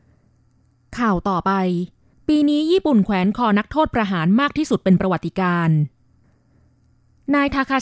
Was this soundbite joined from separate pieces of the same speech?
no; 0 cuts

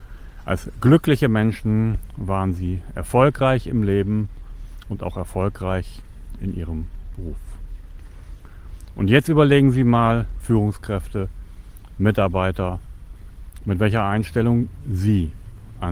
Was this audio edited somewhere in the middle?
yes; 1 cut; at 10.4 s

